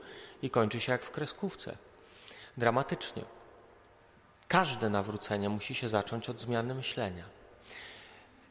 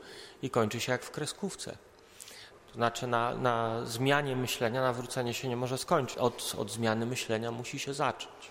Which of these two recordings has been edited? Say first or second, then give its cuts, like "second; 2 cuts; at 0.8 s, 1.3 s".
second; 2 cuts; at 2.5 s, 6.1 s